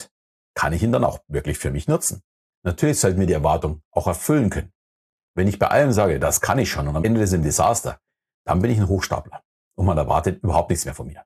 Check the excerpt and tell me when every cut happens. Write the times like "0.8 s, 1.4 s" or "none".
2.5 s, 7.0 s